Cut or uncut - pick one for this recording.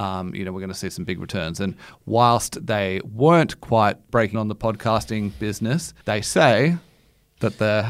cut